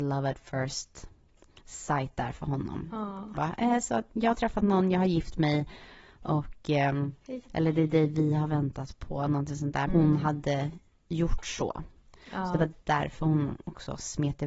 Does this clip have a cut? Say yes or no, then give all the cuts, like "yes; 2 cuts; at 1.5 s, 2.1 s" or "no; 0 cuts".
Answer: yes; 3 cuts; at 3.3 s, 7.4 s, 9.9 s